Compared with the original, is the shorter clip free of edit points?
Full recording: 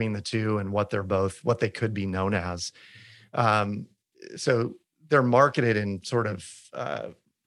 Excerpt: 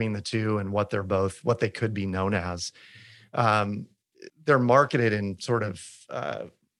no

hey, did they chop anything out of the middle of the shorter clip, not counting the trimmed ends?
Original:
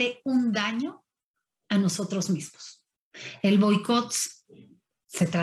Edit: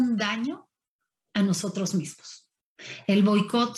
no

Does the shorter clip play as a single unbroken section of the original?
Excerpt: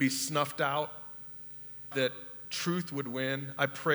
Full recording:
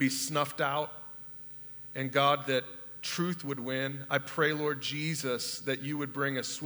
no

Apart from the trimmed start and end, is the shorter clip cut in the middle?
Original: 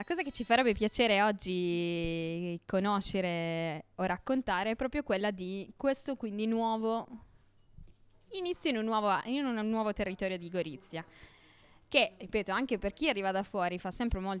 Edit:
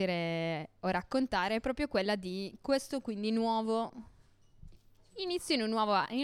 no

